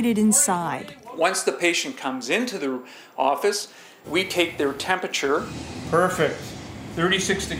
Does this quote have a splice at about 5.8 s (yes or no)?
no